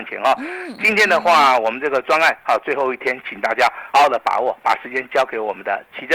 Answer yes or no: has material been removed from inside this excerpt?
yes